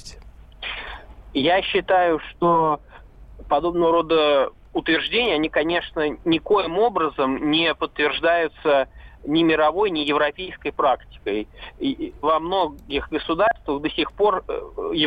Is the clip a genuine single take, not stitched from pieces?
no; 1 cut; at 12.2 s

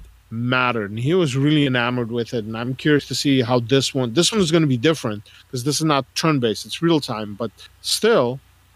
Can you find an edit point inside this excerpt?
no; 0 cuts

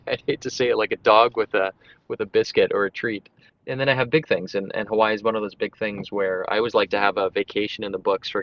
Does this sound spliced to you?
yes; 1 cut; at 3.5 s

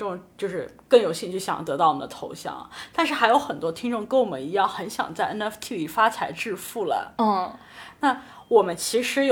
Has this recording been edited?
no; 0 cuts

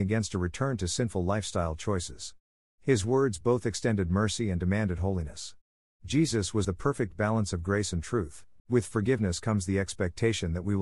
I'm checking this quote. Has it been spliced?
yes; 2 cuts; at 6.6 s, 8.6 s

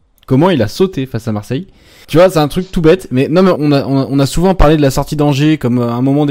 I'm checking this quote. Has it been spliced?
yes; 2 cuts; at 2.0 s, 3.6 s

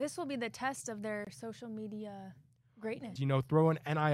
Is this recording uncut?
no; 1 cut; at 3.2 s

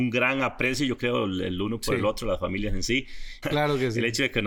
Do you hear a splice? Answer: yes; 1 cut; at 3.4 s

